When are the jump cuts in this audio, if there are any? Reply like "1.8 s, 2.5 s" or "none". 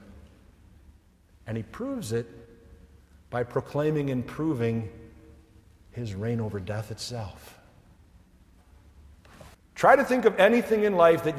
9.5 s

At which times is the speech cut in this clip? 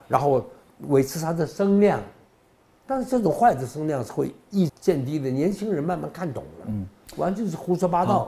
4.7 s

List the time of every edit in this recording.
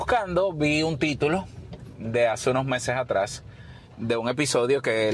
none

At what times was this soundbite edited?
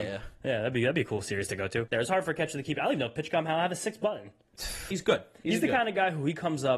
1.9 s, 4.9 s

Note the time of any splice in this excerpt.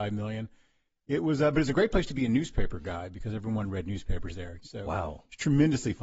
4.6 s

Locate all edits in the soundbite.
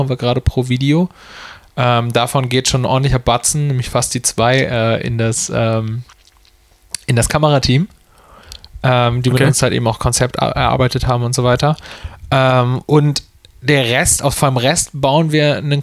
none

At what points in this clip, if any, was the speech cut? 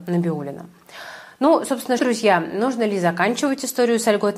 2.0 s

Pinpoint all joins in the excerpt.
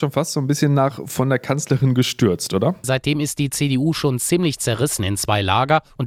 2.8 s

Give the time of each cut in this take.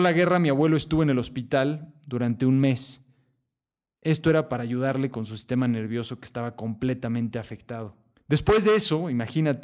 8.1 s

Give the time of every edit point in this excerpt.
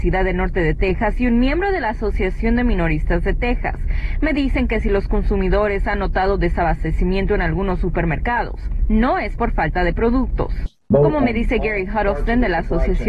10.9 s

